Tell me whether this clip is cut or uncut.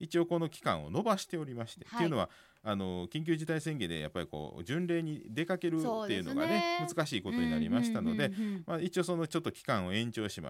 uncut